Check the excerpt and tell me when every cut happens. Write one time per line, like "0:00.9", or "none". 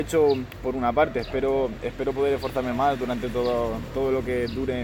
none

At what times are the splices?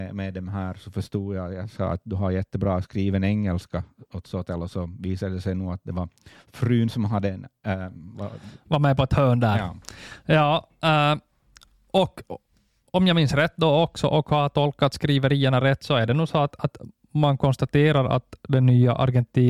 0:08.1

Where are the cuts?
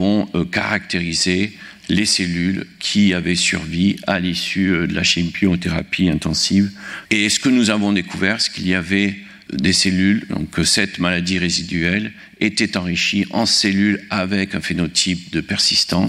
0:07.1
0:09.5

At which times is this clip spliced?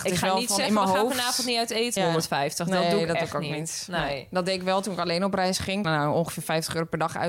0:02.0
0:05.8

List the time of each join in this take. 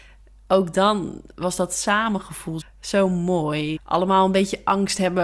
0:02.6
0:03.8

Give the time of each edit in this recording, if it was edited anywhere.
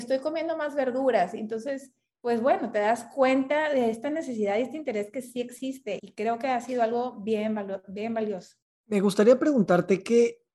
0:06.0

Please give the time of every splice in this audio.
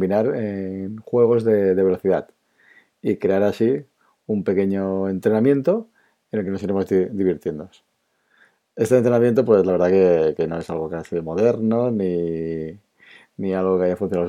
none

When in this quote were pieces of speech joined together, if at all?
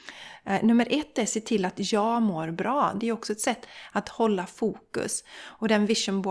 0:03.0

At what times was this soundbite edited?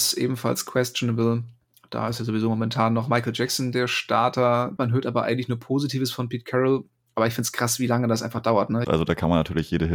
0:04.8
0:08.8

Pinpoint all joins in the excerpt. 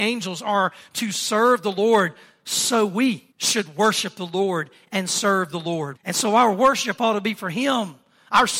0:03.3
0:06.0

